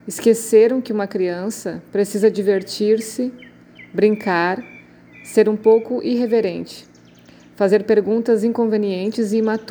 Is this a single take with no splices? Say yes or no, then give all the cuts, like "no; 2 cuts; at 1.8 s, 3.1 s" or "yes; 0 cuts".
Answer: yes; 0 cuts